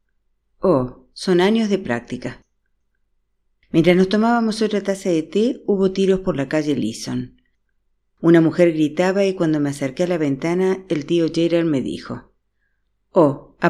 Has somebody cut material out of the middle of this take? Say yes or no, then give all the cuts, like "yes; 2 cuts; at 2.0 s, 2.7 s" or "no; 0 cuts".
no; 0 cuts